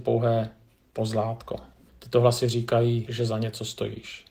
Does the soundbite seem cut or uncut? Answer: cut